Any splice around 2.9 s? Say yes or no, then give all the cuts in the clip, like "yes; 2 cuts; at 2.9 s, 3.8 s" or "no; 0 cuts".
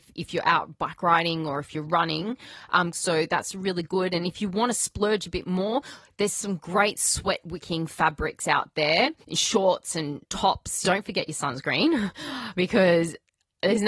yes; 3 cuts; at 2.9 s, 9.2 s, 10.8 s